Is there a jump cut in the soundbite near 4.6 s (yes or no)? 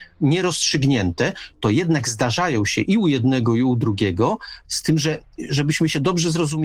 yes